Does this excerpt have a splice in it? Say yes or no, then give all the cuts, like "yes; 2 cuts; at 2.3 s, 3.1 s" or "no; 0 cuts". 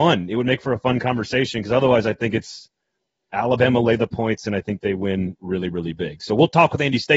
no; 0 cuts